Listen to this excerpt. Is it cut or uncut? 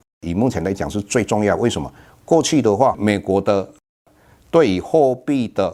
uncut